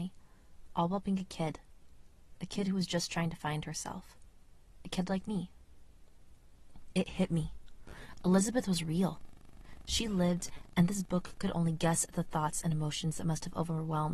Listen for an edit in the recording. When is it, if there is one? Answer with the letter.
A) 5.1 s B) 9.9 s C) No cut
C